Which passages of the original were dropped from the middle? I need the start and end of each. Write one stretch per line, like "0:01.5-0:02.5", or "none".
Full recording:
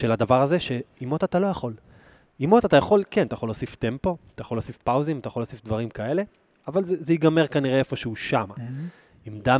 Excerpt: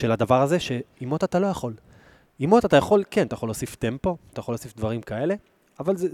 0:04.3-0:05.2